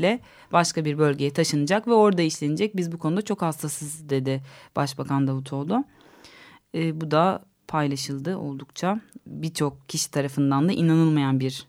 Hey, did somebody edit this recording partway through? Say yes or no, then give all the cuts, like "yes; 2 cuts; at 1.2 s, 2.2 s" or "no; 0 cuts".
no; 0 cuts